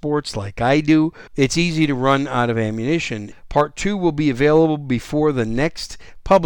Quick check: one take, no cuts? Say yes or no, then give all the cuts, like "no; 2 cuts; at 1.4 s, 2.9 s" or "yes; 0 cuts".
no; 2 cuts; at 1.3 s, 3.3 s